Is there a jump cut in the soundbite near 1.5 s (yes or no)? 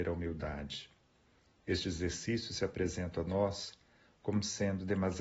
no